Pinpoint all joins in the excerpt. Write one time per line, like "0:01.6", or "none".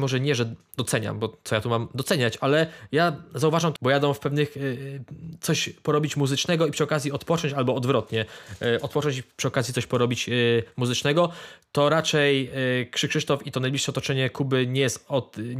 0:03.8